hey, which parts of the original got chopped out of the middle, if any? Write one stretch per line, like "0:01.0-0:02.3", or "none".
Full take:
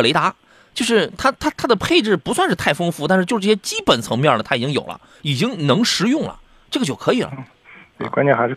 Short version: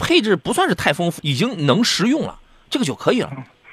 0:03.0-0:05.2

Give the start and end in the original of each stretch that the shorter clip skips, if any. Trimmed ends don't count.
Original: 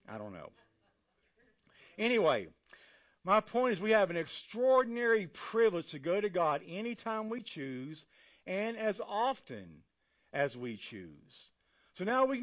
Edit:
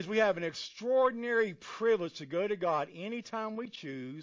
none

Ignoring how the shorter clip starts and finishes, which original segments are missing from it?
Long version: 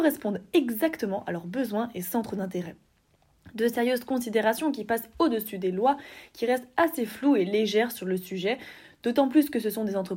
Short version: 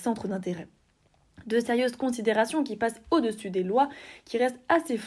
none

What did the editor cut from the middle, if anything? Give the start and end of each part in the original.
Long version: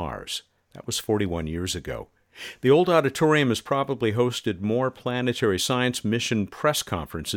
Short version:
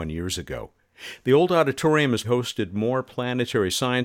0:03.6-0:04.1

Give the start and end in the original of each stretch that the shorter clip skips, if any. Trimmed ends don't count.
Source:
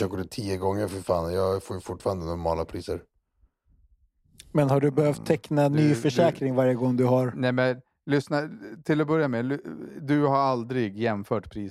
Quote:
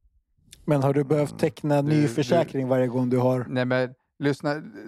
none

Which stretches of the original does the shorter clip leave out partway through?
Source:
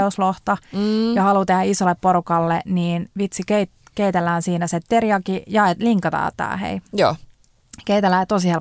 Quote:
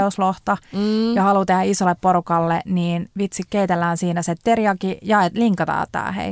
0:03.5-0:03.9

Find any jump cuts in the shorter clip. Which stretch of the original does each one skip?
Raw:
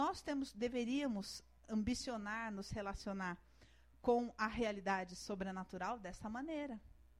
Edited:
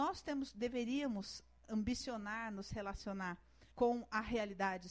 0:03.7-0:04.0

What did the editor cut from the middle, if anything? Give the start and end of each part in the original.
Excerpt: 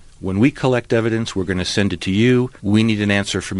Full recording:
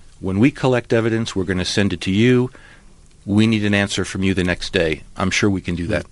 0:02.6-0:03.2

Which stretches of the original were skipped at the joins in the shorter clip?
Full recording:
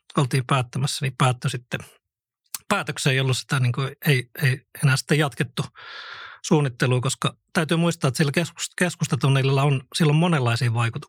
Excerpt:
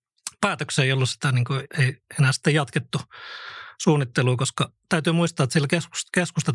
0:04.0-0:04.3

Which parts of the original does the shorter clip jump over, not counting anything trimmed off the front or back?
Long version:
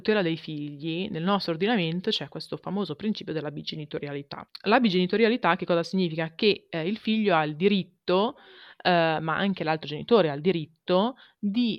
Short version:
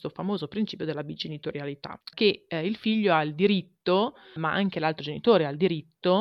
0:04.6-0:06.3
0:08.6-0:09.2

